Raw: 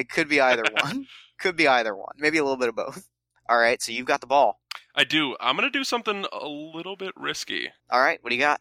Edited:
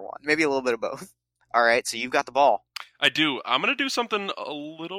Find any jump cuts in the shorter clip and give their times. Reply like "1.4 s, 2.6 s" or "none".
none